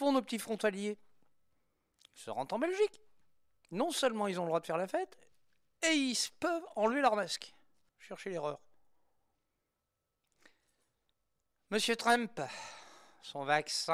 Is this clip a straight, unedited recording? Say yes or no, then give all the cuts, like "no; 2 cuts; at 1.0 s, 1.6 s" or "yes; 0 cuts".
no; 1 cut; at 7.9 s